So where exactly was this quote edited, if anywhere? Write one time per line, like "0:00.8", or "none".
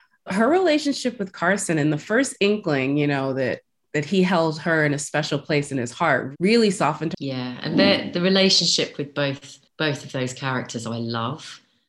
0:07.1
0:09.7

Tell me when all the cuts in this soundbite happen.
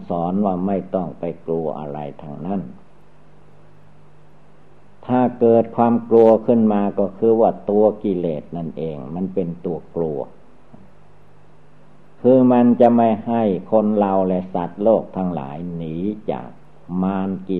none

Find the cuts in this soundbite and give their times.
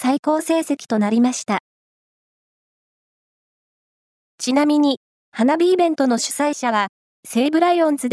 0:04.2

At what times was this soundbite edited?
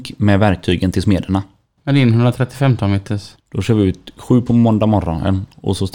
0:01.8
0:03.4

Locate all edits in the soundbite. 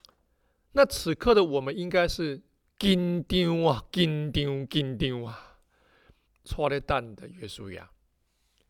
0:06.2

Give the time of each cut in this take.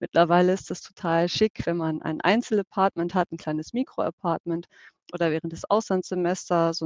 none

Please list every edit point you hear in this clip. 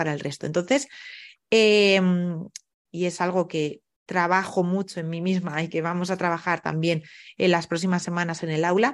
0:02.9

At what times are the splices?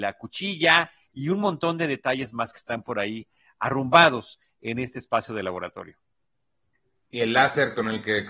none

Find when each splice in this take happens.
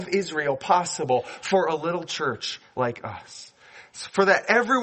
none

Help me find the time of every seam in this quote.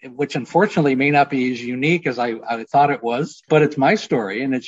0:03.5

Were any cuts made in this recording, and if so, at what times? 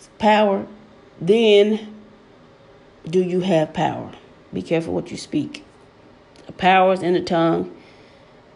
0:01.0
0:04.5

